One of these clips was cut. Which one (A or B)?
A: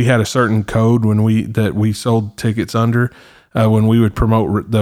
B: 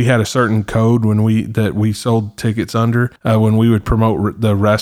B